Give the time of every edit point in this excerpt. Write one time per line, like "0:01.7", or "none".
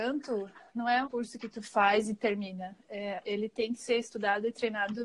0:01.0
0:03.2